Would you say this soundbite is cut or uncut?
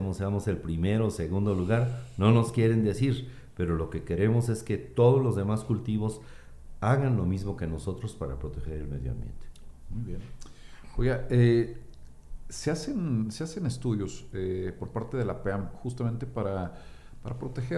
uncut